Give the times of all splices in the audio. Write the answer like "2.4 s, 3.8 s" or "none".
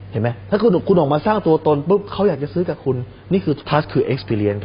3.6 s

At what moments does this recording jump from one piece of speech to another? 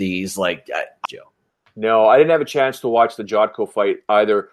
1.0 s

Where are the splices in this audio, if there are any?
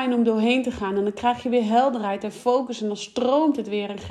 none

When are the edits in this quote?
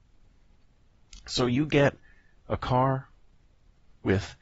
none

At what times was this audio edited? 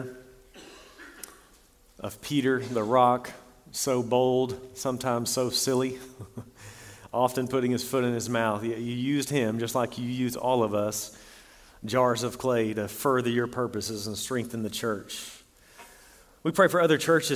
none

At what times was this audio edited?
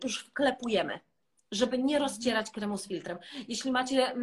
none

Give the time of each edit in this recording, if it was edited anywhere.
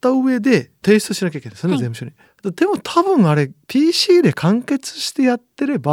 2.3 s

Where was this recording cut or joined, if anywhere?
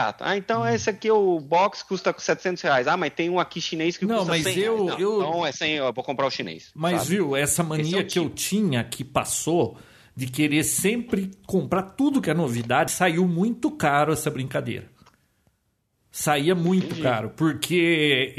12.9 s

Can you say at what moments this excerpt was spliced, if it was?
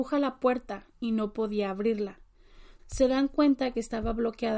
2.8 s

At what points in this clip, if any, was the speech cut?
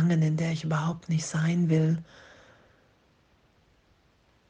none

